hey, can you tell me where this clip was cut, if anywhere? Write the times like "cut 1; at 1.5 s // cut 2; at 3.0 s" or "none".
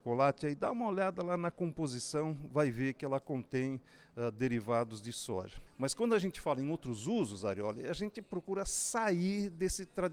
cut 1; at 5.7 s